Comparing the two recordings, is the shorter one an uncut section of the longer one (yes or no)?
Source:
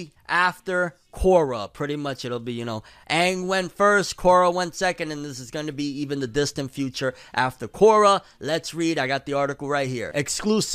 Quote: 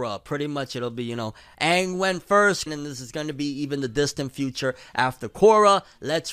no